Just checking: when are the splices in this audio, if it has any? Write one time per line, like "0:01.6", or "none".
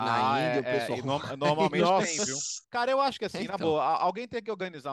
0:02.6